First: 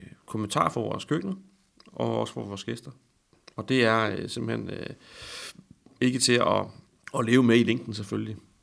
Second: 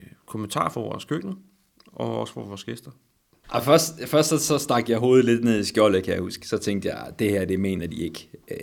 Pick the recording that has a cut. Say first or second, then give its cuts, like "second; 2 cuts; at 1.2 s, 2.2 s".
second; 1 cut; at 3.4 s